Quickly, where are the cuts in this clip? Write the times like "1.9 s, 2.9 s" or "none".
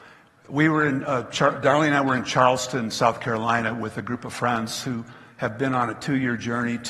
none